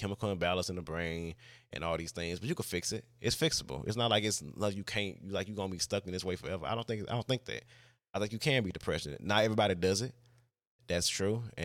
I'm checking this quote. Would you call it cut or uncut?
uncut